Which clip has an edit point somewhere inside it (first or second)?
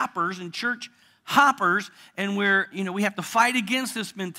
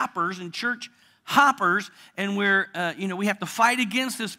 first